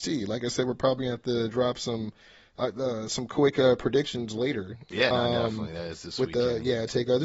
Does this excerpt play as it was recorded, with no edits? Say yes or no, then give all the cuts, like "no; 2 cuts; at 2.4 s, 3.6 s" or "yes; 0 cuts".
yes; 0 cuts